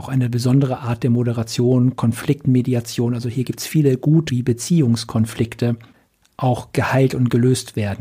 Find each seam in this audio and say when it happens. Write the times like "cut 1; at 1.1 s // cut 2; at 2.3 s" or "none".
cut 1; at 4.3 s